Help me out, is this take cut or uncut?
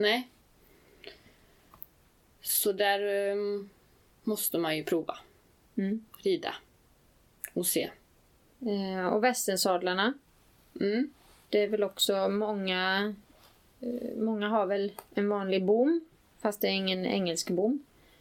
uncut